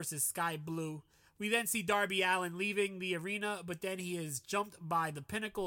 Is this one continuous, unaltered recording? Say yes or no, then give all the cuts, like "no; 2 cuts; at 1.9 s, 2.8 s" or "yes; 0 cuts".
yes; 0 cuts